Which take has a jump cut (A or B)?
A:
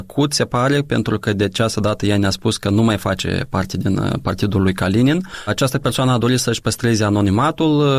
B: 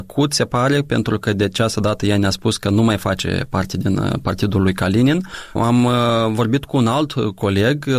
A